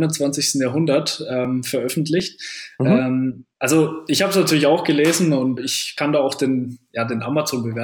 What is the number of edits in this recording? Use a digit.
2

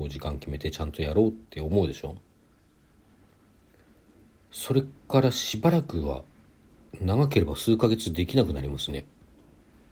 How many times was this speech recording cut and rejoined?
1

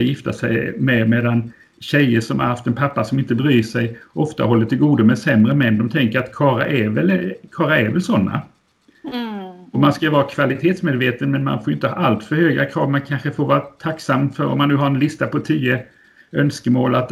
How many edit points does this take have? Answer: 0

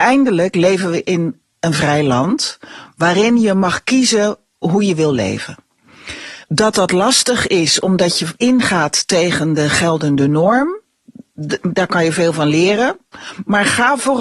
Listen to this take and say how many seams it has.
1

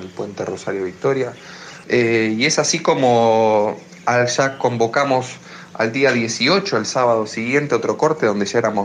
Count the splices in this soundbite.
1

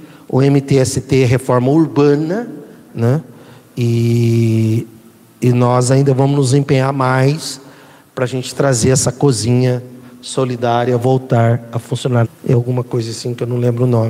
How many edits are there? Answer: 2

